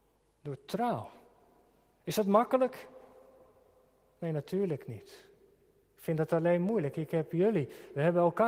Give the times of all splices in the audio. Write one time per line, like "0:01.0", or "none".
none